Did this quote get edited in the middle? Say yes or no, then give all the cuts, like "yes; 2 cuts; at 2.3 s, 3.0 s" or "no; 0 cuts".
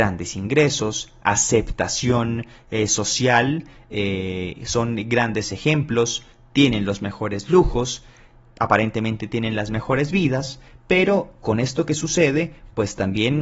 no; 0 cuts